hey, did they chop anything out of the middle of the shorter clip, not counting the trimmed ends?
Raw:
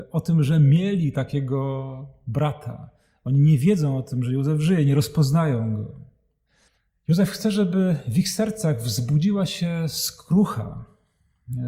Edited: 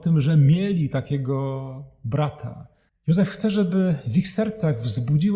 yes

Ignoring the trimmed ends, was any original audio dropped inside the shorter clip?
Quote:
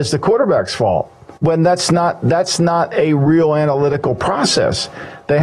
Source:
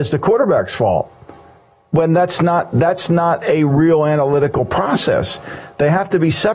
yes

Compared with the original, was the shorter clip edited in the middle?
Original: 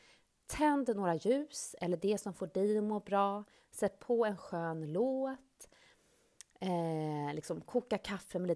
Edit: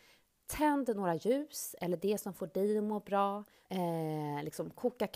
yes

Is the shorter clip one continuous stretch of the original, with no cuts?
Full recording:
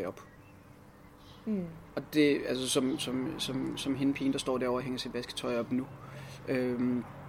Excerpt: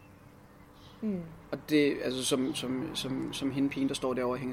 yes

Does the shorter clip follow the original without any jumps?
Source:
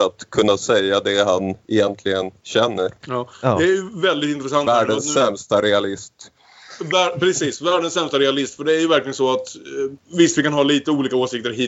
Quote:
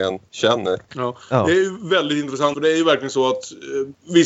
no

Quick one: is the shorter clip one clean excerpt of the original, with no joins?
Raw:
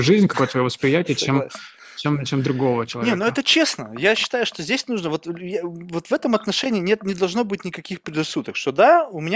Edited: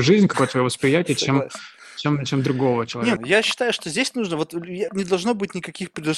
no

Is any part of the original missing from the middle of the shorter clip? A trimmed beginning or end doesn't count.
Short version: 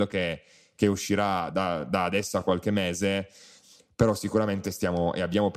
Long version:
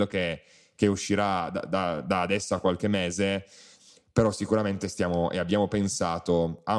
yes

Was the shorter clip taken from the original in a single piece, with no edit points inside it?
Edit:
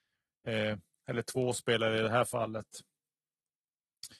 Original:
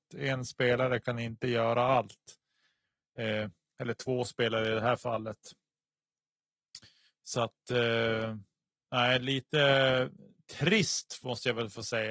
yes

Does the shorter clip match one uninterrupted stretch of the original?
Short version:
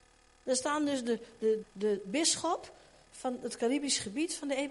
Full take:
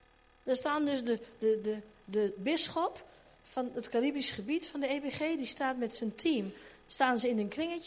no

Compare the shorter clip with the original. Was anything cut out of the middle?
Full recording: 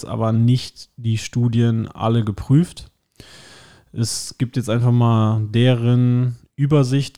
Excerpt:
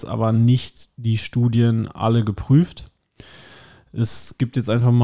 no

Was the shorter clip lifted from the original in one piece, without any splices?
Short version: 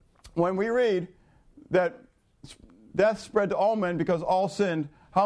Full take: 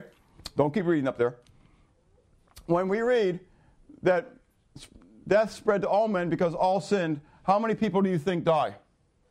yes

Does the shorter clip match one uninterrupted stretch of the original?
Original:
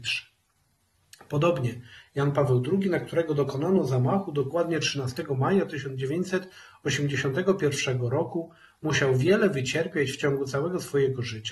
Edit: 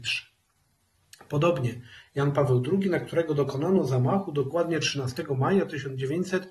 yes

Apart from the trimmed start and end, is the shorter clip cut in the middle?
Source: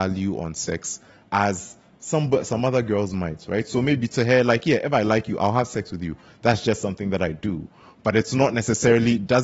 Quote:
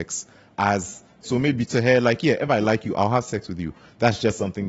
yes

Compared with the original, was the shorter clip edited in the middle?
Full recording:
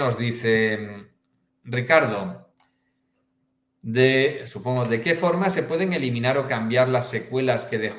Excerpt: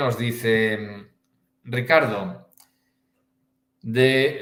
no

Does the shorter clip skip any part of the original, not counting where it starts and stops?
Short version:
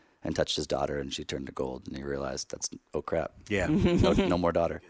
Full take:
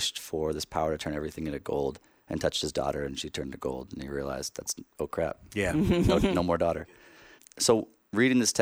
no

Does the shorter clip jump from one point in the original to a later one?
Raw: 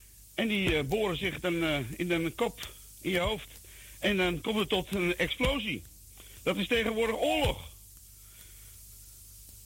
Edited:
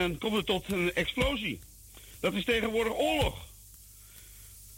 no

